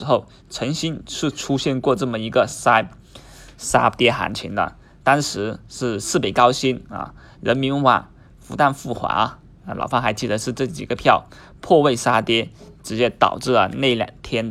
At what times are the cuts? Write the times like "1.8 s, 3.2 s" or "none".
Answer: none